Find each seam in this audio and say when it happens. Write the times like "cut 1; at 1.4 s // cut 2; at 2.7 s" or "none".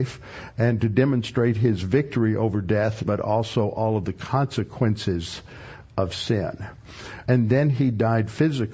cut 1; at 3.0 s // cut 2; at 7.2 s